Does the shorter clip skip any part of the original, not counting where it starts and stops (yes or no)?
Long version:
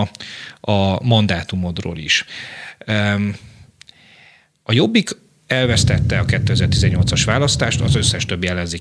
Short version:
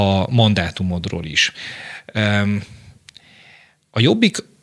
no